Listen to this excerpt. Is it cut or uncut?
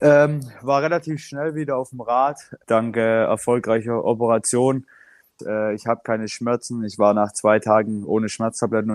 cut